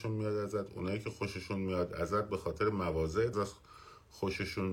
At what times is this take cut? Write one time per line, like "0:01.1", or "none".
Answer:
0:03.3